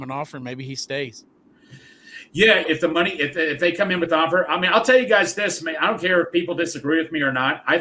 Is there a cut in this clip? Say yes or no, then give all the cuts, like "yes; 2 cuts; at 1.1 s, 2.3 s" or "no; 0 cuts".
yes; 1 cut; at 2.6 s